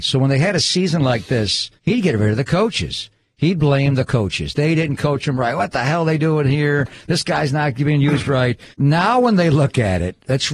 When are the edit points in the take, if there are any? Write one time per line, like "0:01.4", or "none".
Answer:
0:01.8
0:08.7